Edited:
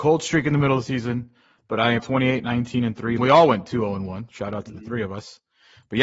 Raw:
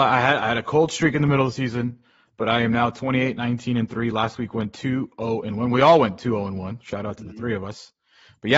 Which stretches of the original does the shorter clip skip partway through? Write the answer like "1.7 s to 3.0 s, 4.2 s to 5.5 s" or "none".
2.7 s to 2.9 s, 4.1 s to 5.7 s